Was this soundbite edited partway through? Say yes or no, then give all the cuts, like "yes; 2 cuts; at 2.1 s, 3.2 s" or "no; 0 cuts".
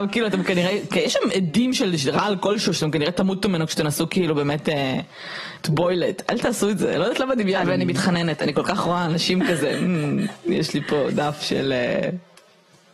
yes; 1 cut; at 7.6 s